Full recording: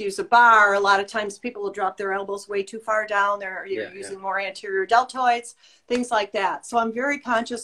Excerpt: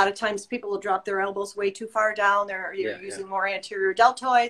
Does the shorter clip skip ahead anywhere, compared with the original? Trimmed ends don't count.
no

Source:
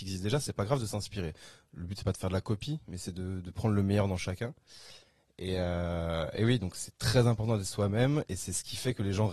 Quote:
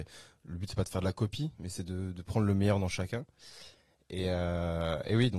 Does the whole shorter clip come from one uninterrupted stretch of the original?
yes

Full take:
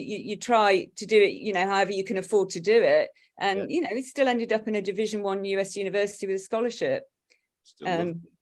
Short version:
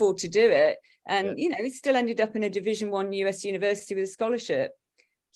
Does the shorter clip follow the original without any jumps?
yes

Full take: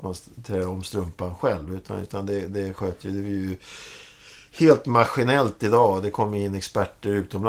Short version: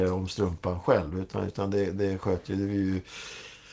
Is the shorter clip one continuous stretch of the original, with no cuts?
yes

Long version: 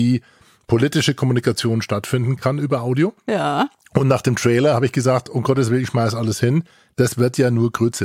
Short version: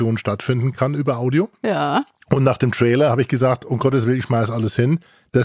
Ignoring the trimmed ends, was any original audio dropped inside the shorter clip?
no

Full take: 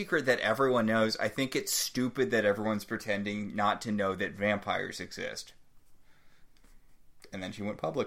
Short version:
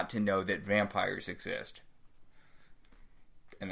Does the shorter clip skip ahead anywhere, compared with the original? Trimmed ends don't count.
no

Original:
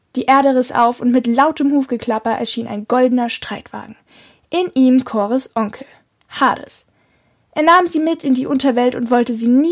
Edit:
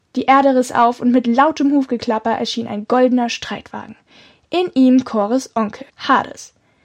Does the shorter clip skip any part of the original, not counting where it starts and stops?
yes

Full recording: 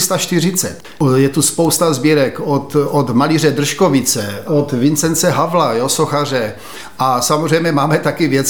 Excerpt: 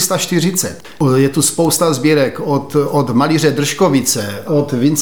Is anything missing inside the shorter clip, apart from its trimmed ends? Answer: no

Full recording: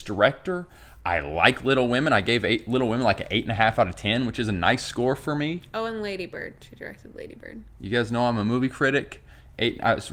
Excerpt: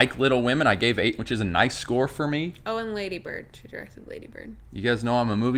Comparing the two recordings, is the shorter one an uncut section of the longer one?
no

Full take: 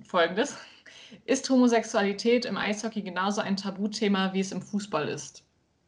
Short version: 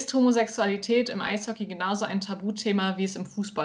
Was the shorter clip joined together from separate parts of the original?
no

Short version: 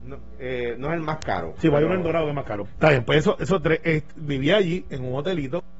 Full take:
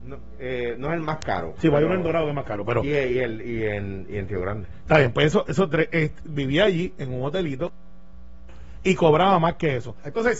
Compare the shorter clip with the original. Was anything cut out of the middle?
yes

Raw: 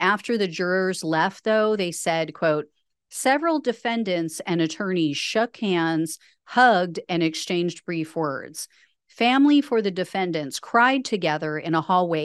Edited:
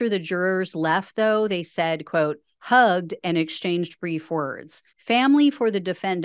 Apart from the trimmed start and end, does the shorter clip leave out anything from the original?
yes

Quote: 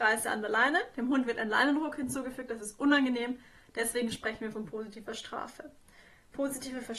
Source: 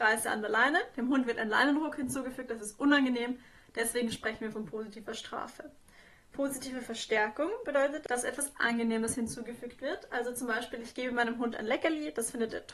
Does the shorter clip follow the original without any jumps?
yes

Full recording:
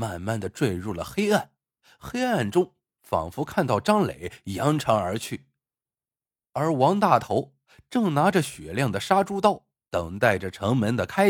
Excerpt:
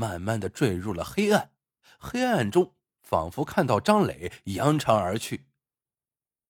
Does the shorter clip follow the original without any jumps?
yes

